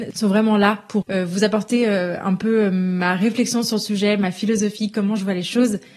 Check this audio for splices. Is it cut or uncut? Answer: cut